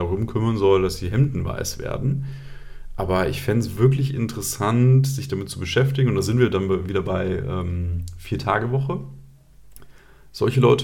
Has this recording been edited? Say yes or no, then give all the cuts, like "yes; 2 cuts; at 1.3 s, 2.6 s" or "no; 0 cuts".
no; 0 cuts